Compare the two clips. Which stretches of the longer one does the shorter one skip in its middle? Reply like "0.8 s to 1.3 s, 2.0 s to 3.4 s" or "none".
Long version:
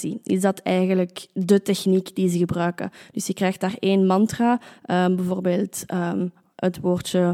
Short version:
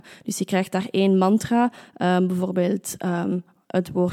none